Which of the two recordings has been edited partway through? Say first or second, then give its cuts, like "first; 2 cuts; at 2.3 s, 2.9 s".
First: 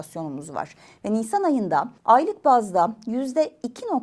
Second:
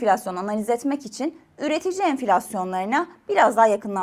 first; 1 cut; at 2.0 s